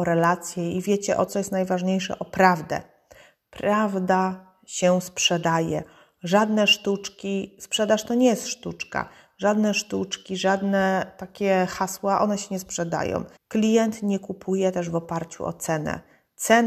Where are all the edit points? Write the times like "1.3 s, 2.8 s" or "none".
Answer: 1.3 s, 13.4 s